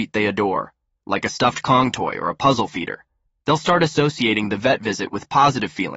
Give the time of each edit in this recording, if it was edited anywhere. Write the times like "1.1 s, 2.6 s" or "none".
none